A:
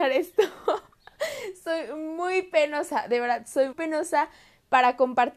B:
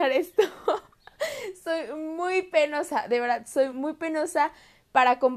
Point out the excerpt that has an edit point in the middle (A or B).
A